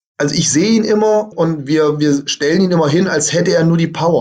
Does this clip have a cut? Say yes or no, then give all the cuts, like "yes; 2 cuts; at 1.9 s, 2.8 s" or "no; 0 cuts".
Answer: yes; 1 cut; at 1.3 s